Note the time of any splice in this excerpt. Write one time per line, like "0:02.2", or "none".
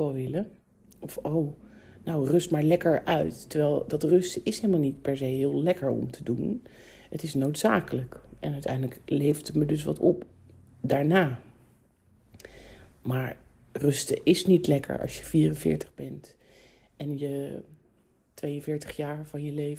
none

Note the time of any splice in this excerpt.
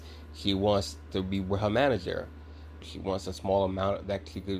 0:02.8

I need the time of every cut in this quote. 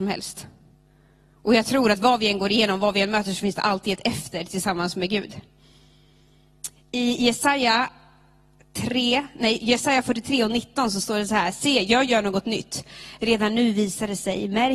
none

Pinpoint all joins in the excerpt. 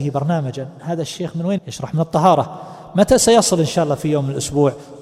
0:01.6

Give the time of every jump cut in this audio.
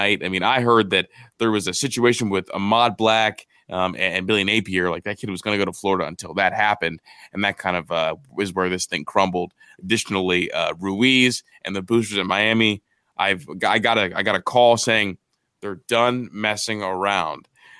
none

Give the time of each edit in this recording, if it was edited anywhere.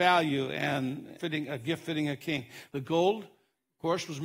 0:01.2
0:02.7

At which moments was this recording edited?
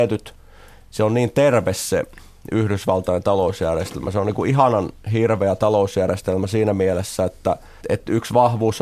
0:07.8

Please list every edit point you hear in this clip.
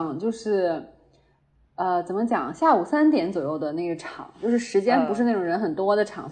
none

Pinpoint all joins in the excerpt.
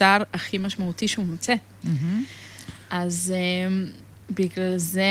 none

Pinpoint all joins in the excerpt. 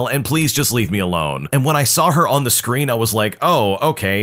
0:01.5

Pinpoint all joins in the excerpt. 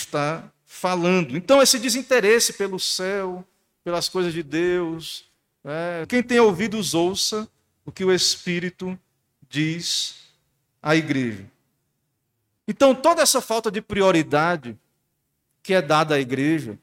0:06.0

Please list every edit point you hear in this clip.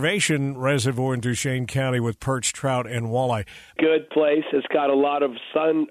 0:03.8

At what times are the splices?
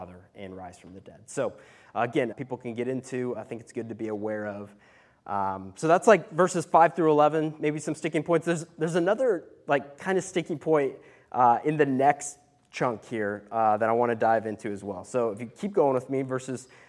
0:02.3

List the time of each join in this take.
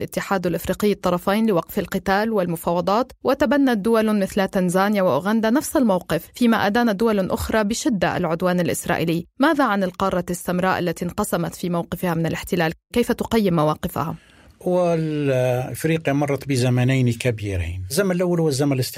none

